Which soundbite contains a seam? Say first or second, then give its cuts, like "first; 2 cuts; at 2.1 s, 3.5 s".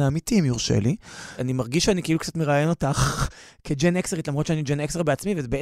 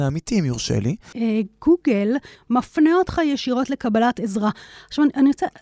second; 2 cuts; at 1.1 s, 2.4 s